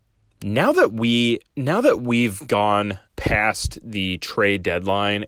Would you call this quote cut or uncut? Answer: cut